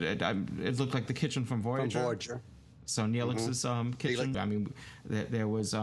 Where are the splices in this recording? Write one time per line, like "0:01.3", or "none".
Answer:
0:04.3